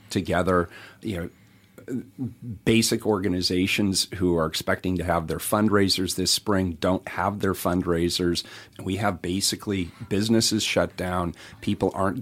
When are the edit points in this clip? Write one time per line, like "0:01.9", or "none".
0:01.0
0:08.7